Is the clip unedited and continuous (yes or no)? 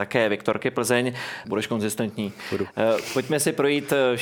no